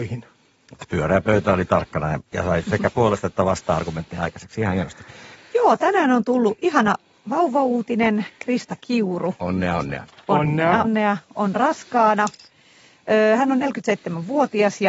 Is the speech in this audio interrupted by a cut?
yes; 2 cuts; at 5.4 s, 10.8 s

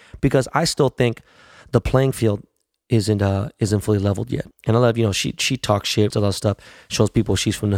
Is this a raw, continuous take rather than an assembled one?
no; 2 cuts; at 4.5 s, 6.1 s

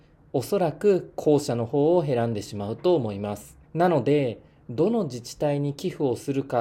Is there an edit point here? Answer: yes; 1 cut; at 3.6 s

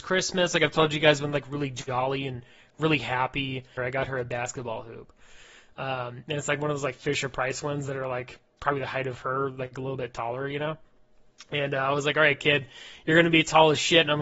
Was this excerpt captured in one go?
no; 1 cut; at 3.8 s

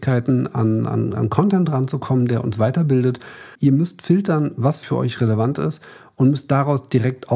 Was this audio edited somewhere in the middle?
yes; 2 cuts; at 3.5 s, 4.8 s

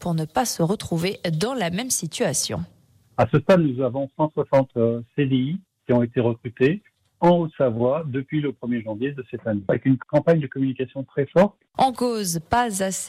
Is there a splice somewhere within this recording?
yes; 1 cut; at 11.7 s

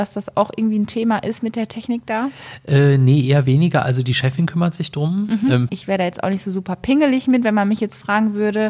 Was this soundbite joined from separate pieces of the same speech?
yes; 1 cut; at 5.7 s

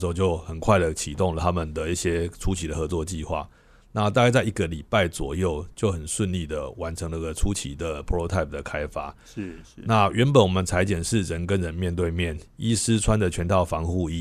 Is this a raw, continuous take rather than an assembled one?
yes; 0 cuts

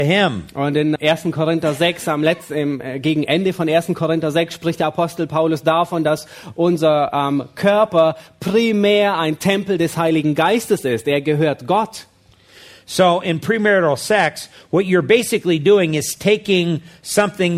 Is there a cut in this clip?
yes; 1 cut; at 1.0 s

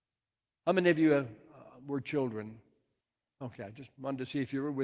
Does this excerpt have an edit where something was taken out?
no; 0 cuts

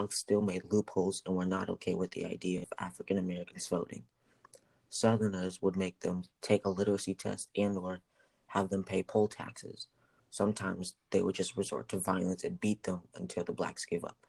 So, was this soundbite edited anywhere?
no; 0 cuts

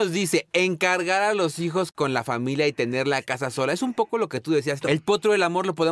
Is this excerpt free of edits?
no; 1 cut; at 4.8 s

